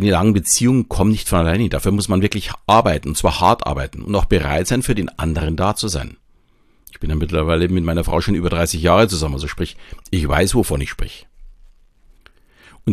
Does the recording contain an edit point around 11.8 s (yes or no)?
no